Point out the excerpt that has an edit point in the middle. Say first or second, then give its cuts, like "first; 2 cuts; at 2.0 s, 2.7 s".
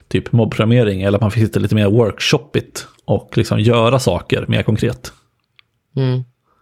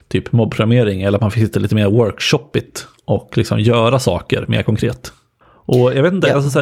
second; 1 cut; at 5.4 s